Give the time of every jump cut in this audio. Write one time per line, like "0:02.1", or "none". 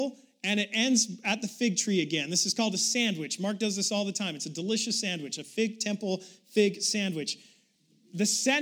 none